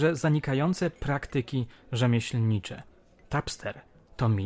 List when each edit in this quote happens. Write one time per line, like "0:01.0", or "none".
none